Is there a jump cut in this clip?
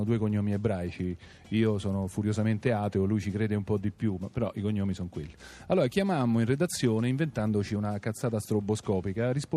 no; 0 cuts

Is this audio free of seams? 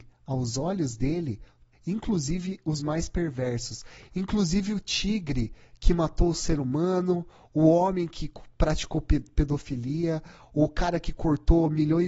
no; 1 cut; at 1.7 s

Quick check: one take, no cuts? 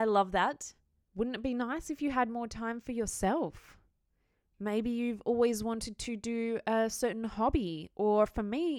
no; 1 cut; at 1.0 s

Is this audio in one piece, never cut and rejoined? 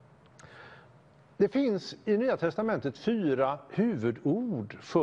yes; 0 cuts

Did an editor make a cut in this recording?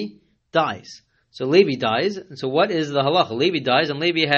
no; 0 cuts

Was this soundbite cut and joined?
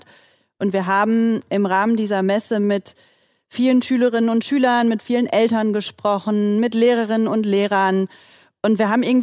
no; 0 cuts

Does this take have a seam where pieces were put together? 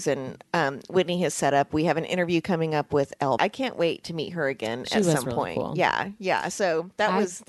yes; 1 cut; at 3.4 s

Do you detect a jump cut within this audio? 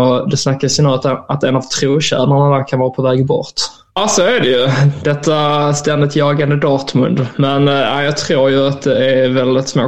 yes; 1 cut; at 3.9 s

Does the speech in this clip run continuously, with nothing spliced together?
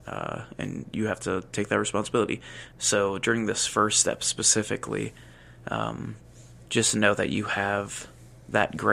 no; 1 cut; at 2.7 s

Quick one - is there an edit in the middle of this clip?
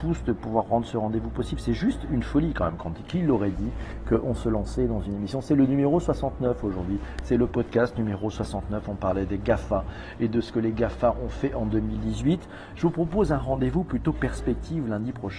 no; 0 cuts

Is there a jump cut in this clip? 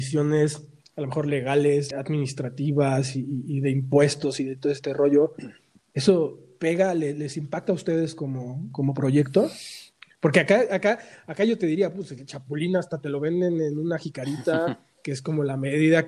yes; 1 cut; at 1.9 s

